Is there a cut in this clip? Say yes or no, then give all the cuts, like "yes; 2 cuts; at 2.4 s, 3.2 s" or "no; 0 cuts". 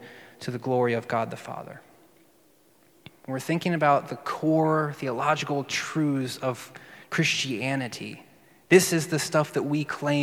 yes; 1 cut; at 3.1 s